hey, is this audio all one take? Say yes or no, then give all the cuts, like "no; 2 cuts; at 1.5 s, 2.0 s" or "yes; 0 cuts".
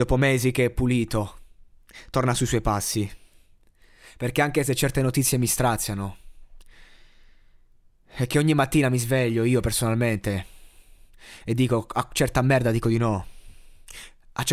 yes; 0 cuts